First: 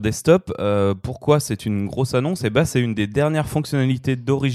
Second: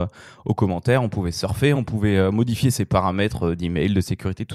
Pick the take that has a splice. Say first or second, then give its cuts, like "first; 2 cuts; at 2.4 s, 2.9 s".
second; 1 cut; at 1.7 s